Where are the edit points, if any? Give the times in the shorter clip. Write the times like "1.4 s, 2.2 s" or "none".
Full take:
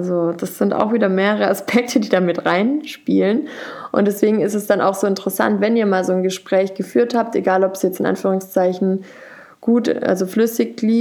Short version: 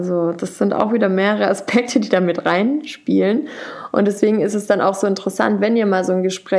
none